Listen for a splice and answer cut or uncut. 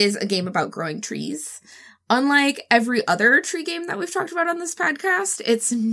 uncut